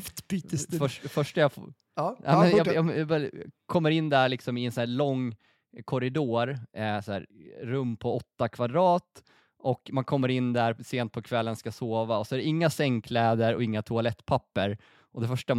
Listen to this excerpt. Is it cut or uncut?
uncut